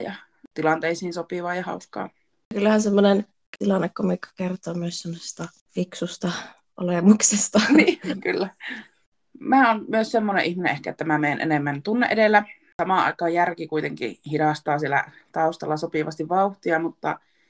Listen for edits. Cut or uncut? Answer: uncut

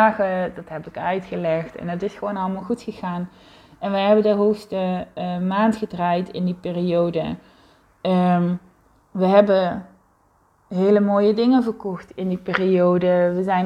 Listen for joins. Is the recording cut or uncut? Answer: uncut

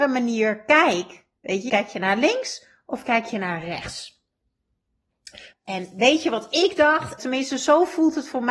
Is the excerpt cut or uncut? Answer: cut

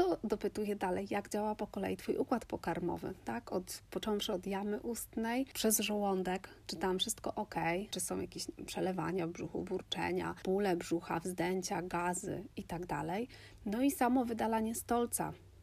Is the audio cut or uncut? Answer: cut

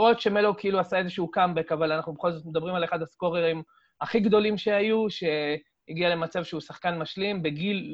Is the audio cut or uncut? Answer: uncut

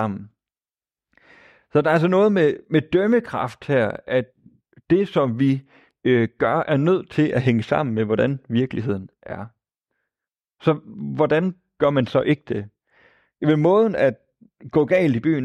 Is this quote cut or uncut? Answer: uncut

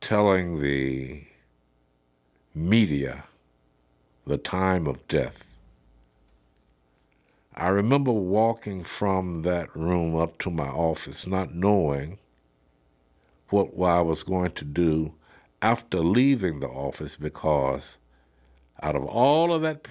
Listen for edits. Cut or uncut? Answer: uncut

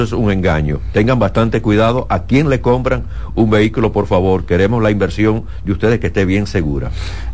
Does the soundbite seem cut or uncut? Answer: uncut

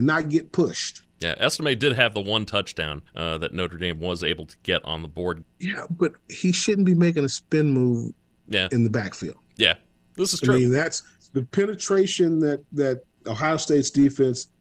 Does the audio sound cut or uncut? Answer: cut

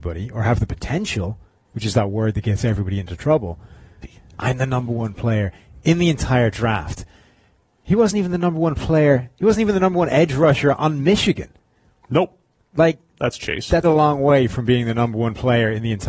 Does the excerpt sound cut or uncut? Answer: cut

